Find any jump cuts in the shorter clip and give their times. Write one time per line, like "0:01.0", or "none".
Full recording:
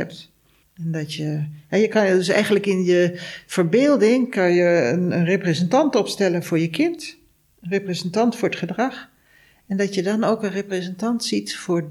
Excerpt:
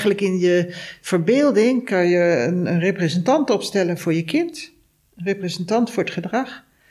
none

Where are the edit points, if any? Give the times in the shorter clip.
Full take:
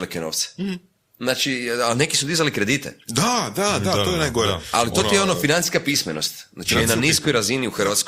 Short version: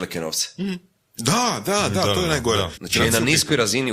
0:01.1
0:02.7

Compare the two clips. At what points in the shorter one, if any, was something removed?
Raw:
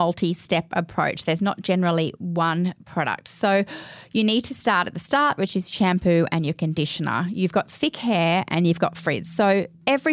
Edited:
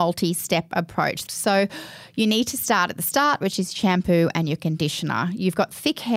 0:01.3

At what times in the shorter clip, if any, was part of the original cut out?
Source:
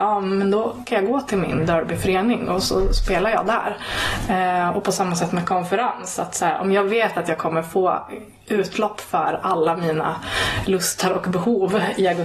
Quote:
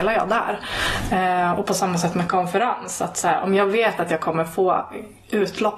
none

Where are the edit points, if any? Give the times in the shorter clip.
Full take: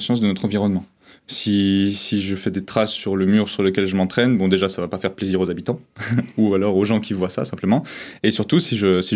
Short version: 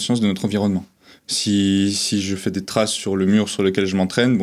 none

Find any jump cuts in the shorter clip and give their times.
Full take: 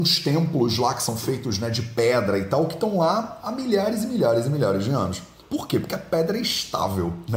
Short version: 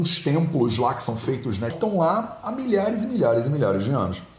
0:01.7

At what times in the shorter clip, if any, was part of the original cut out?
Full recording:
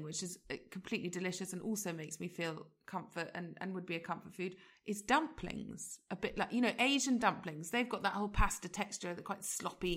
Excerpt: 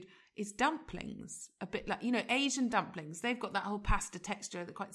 none

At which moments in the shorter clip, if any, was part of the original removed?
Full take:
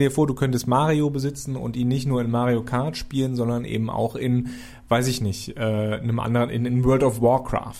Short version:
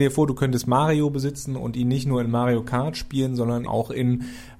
0:03.7

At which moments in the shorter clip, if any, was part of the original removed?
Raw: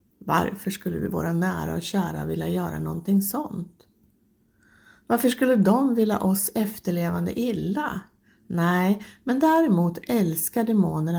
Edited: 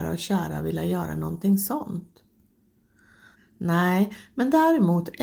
0:03.3

